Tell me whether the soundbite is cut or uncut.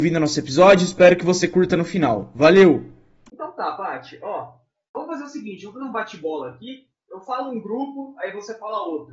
uncut